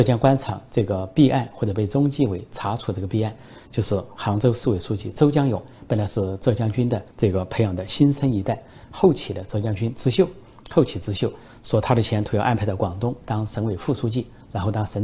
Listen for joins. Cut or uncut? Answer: cut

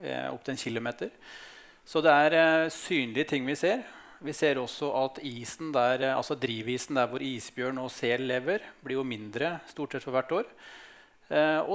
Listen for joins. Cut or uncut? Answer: uncut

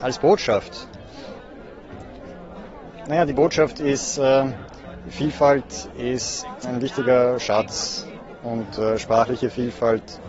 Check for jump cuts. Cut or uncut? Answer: cut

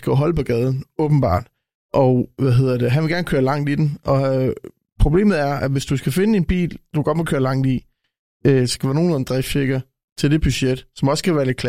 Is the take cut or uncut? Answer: uncut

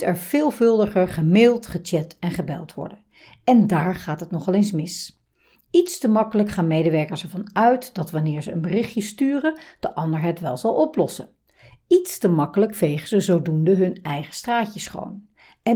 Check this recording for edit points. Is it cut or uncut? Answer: uncut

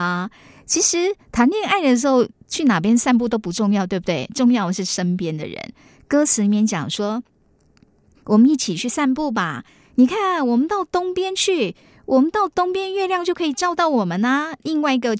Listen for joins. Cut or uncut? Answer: uncut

